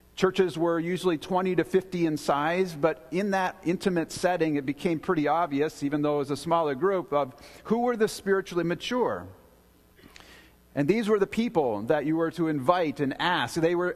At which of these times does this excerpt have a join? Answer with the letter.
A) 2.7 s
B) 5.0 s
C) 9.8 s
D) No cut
D